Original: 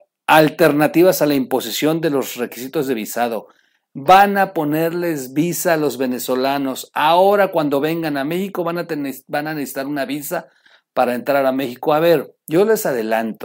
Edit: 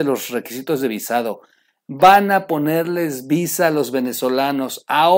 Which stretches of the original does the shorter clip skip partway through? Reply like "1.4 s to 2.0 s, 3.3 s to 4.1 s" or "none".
none